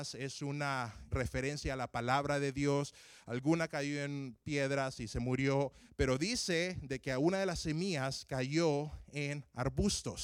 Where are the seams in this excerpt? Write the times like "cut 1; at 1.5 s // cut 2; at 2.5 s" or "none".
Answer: cut 1; at 1.1 s